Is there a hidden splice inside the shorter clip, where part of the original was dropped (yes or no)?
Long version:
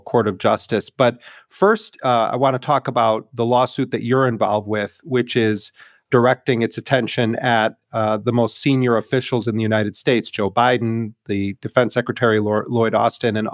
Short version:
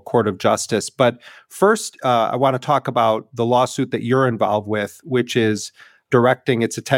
no